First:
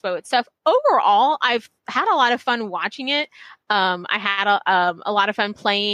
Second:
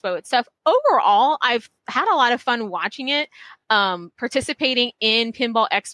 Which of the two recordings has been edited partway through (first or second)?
first